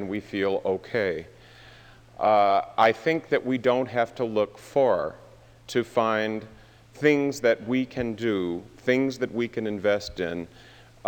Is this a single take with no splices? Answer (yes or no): yes